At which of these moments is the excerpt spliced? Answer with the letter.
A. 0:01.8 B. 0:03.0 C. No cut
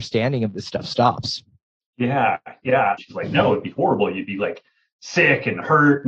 B